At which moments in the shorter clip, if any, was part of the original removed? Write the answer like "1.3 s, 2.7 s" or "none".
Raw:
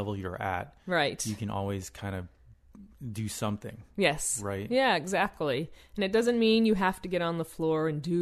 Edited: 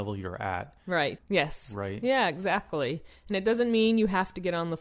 1.2 s